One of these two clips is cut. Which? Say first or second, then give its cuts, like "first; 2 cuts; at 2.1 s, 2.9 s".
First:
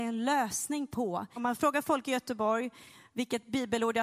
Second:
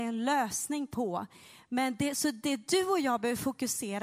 first; 1 cut; at 1.4 s